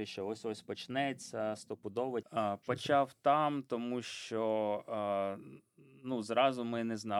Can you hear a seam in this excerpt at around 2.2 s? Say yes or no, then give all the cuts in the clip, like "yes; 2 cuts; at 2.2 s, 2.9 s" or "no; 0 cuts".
yes; 1 cut; at 2.2 s